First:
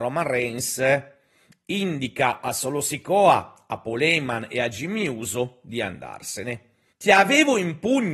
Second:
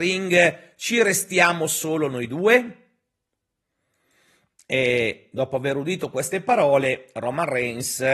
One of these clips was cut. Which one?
first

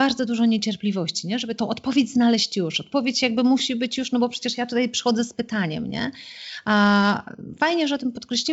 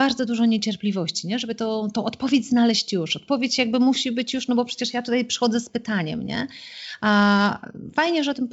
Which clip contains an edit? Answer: first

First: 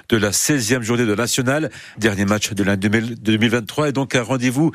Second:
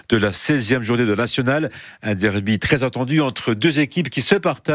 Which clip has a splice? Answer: first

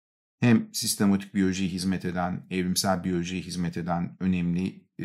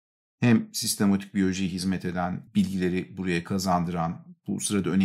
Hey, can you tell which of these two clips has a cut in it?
second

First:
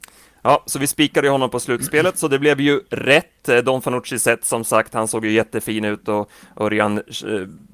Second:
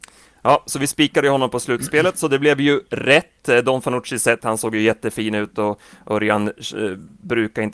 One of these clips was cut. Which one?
second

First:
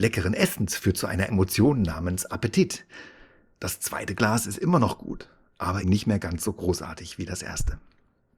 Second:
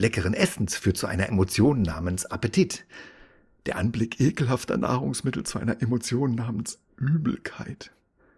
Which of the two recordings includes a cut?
first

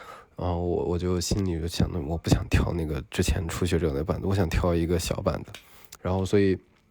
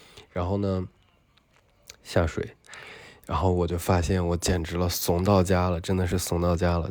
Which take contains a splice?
first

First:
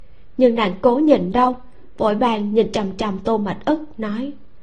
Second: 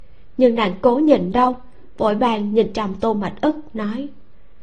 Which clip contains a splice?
second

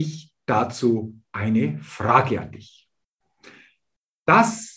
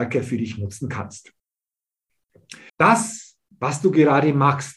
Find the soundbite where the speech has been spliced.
second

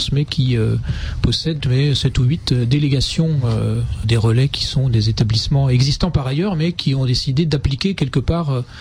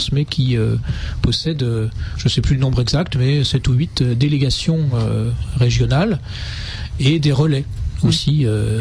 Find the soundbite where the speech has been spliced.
first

